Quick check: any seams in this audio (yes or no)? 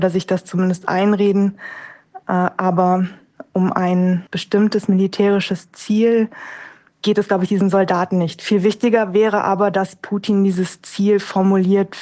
yes